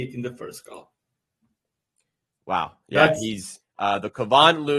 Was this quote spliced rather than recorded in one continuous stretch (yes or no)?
yes